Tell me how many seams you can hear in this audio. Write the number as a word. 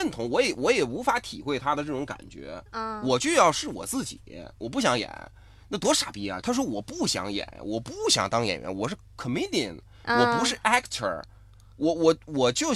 one